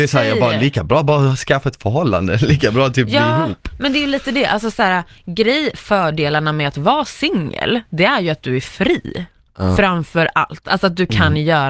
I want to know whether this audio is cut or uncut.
uncut